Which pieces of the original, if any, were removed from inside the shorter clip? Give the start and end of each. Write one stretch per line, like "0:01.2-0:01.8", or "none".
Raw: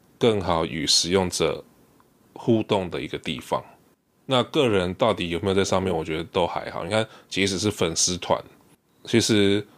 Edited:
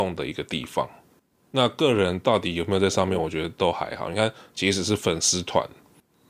none